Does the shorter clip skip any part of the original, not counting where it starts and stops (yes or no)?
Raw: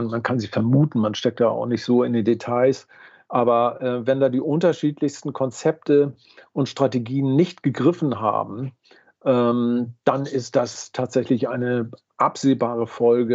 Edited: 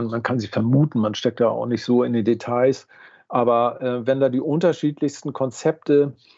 no